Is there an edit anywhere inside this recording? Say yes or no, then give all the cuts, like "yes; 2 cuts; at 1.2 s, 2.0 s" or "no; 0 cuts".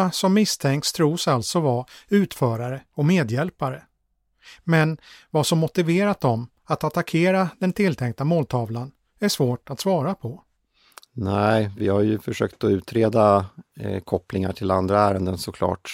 no; 0 cuts